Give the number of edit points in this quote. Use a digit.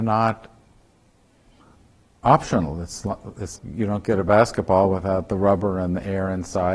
1